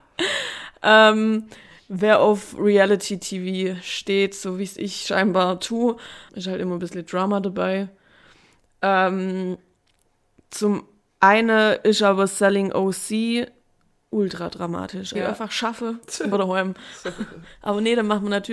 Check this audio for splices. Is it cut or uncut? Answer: cut